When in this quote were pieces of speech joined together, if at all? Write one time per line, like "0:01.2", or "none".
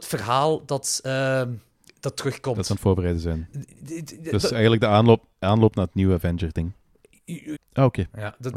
0:07.5